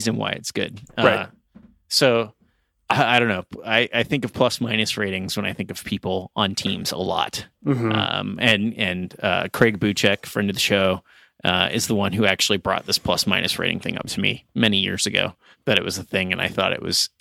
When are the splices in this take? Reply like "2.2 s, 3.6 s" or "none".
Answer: none

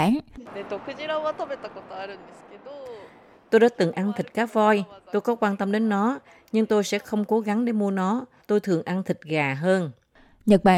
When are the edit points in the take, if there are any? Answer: none

